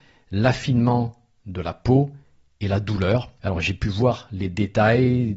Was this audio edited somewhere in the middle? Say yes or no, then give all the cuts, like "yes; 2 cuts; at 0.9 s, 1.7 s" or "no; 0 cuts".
yes; 1 cut; at 3.4 s